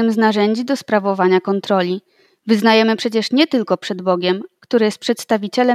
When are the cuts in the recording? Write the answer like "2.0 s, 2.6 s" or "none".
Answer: 4.5 s